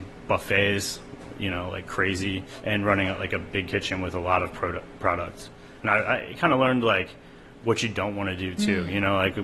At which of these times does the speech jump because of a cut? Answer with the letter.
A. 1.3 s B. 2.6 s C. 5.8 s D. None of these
B